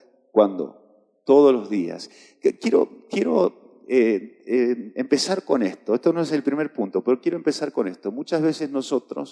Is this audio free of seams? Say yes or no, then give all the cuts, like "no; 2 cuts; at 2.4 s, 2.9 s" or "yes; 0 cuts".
yes; 0 cuts